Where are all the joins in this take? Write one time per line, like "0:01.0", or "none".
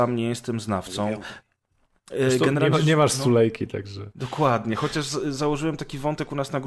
none